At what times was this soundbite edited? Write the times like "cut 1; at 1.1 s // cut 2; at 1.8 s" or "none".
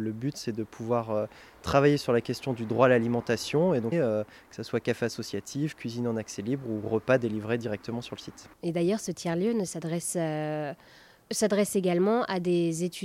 cut 1; at 3.9 s // cut 2; at 8.5 s